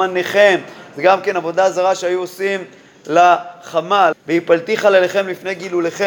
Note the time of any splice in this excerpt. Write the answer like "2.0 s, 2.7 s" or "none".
4.1 s